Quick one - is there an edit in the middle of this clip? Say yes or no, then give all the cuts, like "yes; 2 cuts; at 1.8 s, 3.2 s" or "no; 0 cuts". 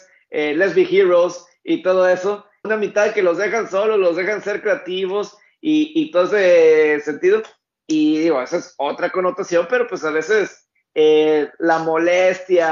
yes; 1 cut; at 2.6 s